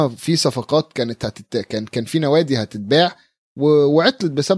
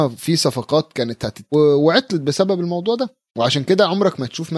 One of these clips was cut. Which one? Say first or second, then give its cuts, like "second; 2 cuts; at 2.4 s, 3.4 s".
second; 2 cuts; at 1.5 s, 3.3 s